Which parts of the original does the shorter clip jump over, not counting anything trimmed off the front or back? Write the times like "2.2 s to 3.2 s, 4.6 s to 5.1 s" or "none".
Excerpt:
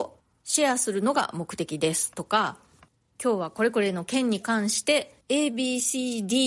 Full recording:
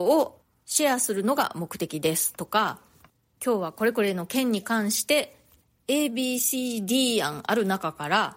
5.4 s to 5.8 s